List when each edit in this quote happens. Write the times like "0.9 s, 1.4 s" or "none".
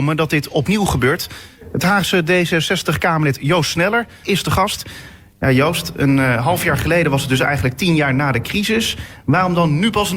4.2 s